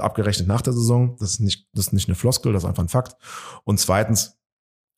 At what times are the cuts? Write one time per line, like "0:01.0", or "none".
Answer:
none